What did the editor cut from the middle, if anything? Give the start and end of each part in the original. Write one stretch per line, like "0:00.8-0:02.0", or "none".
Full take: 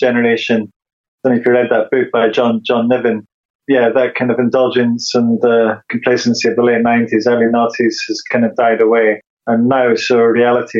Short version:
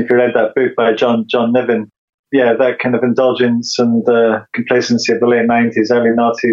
none